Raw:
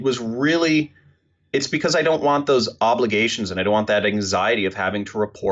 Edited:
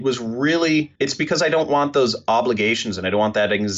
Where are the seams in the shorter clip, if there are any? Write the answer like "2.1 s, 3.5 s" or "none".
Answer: 1.0 s